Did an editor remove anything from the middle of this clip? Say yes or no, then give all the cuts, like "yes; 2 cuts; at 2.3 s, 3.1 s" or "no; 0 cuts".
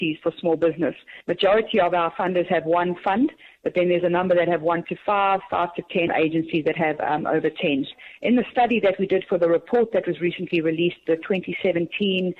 yes; 1 cut; at 6.1 s